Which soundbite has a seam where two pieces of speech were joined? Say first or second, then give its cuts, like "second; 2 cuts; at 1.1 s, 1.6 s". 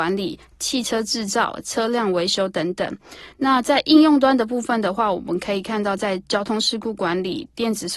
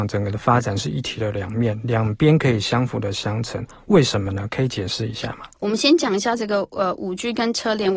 second; 1 cut; at 5.5 s